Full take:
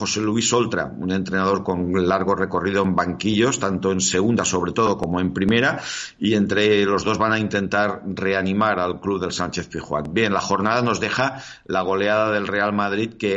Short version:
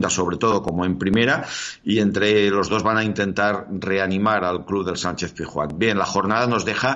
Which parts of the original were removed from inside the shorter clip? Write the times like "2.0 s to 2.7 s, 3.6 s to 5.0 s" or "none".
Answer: none

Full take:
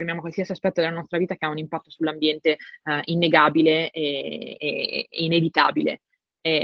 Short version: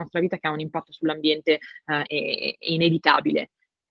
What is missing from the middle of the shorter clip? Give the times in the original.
3.0 s to 4.6 s

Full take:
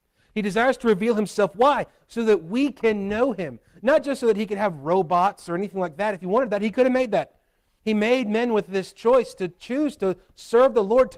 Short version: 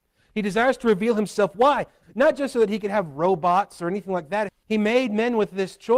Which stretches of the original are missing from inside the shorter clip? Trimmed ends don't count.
2.0 s to 3.7 s, 6.2 s to 7.6 s

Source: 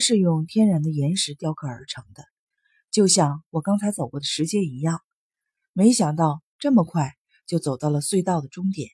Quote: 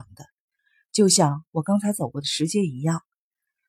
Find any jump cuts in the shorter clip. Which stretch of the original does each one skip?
none

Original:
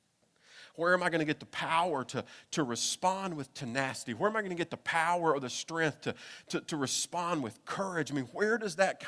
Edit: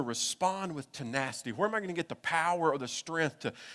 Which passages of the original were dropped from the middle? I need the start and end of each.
none

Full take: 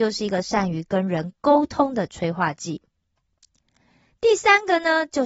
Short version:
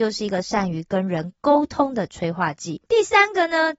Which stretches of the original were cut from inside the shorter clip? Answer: 2.9 s to 4.2 s

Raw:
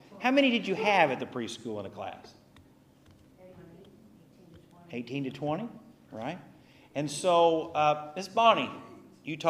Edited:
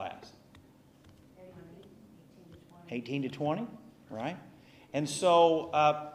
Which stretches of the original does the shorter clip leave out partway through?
none

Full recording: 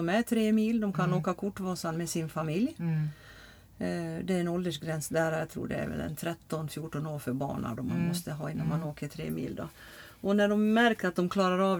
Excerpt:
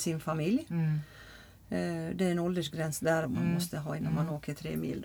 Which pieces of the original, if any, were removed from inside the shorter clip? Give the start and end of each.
5.3 s to 7.8 s

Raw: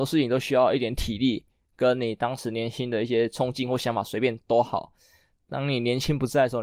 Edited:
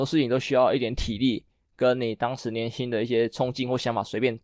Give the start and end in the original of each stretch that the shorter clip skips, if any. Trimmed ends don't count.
none

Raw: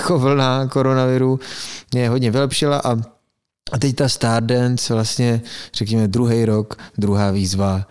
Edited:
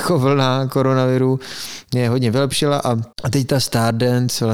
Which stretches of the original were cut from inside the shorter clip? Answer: 3.1 s to 3.6 s

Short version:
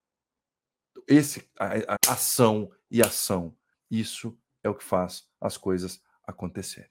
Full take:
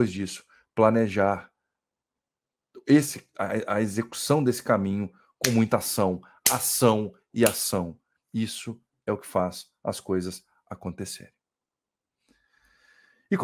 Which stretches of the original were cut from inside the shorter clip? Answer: 3.7 s to 6.4 s

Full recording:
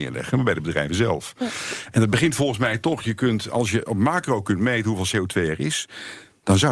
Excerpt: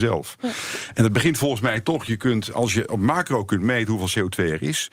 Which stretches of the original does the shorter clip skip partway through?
none

